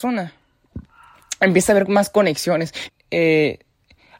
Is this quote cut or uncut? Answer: cut